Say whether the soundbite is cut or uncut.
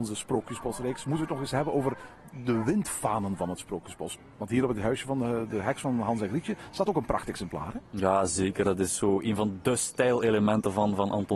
uncut